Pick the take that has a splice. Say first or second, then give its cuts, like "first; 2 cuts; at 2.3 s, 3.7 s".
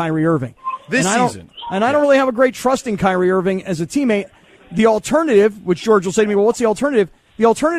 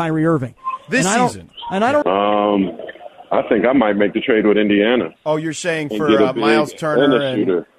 second; 2 cuts; at 2.0 s, 5.2 s